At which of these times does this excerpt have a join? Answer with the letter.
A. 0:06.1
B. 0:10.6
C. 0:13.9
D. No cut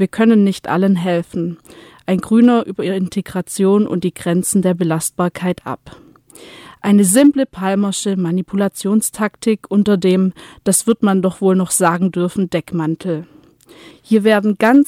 C